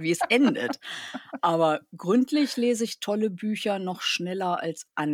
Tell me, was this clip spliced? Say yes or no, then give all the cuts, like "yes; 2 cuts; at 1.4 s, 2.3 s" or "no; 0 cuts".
no; 0 cuts